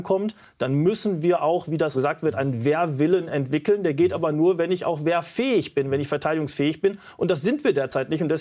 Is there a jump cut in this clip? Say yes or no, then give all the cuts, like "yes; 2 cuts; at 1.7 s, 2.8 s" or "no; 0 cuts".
yes; 1 cut; at 1.9 s